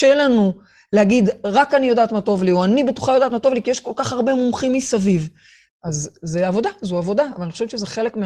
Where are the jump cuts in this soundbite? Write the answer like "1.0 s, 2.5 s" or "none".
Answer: 5.7 s